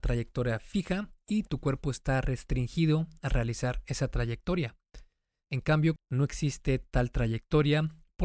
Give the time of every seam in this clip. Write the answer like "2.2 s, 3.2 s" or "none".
6.0 s

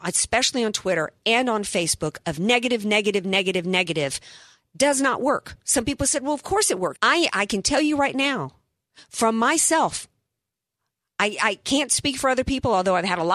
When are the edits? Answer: 7.0 s

